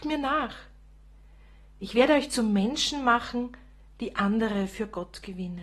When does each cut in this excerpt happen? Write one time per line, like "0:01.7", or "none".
none

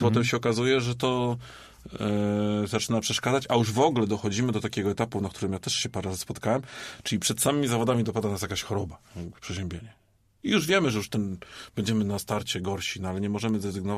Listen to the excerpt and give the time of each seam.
none

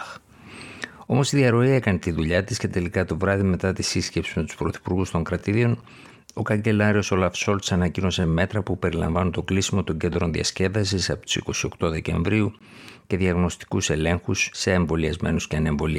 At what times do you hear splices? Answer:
none

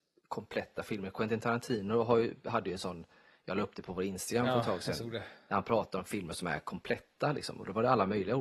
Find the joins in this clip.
none

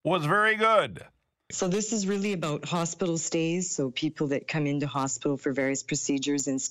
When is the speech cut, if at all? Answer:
0:01.5

